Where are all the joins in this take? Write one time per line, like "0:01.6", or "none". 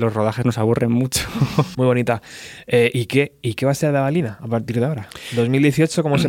0:01.7